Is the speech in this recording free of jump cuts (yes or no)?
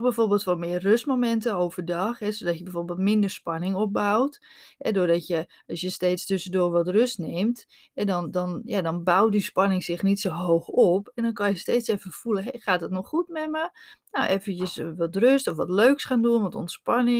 yes